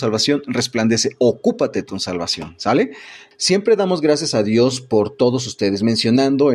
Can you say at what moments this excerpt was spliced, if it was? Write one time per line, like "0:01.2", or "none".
0:03.3